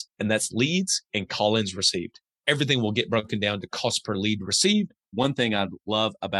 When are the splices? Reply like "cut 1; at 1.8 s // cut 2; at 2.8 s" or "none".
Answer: cut 1; at 5.1 s